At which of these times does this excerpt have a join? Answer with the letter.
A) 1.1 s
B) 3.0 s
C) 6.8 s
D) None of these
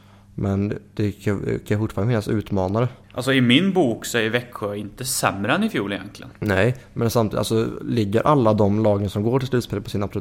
B